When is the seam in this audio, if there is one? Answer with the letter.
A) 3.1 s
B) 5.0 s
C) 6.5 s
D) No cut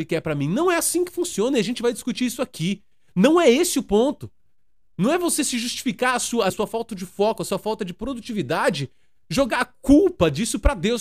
C